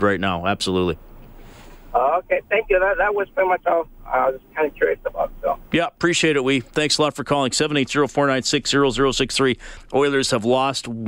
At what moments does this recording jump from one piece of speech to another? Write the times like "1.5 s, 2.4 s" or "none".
none